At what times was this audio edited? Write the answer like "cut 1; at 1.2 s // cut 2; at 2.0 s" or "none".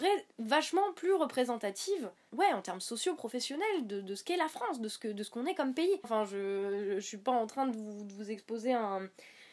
cut 1; at 6.0 s